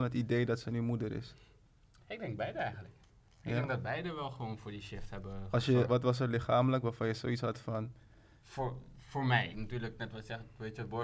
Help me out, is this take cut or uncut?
cut